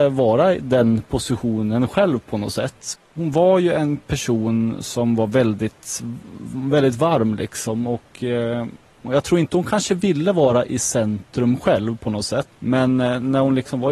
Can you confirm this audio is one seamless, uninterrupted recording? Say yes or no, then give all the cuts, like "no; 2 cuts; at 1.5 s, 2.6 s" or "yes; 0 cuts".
no; 2 cuts; at 2.9 s, 12.5 s